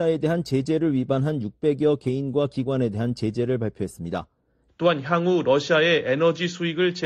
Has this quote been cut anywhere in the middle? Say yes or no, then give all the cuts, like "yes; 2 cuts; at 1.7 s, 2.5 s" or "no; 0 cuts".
yes; 1 cut; at 4.7 s